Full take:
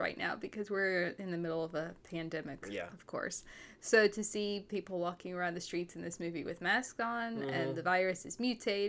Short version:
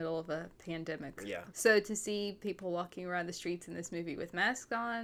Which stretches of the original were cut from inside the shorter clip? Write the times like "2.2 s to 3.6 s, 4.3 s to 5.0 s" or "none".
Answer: 3.0 s to 3.8 s